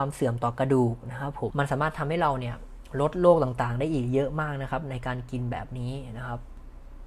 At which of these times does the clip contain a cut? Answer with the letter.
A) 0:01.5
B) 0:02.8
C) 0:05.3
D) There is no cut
A